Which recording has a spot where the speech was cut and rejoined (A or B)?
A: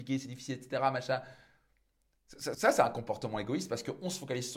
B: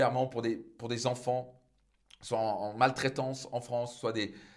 A